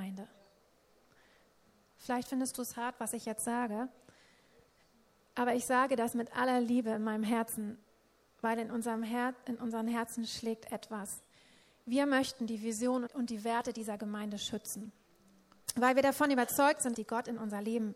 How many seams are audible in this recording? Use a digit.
2